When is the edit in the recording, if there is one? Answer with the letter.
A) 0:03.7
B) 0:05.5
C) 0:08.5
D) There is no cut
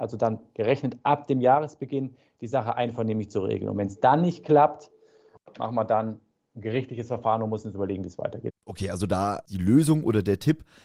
C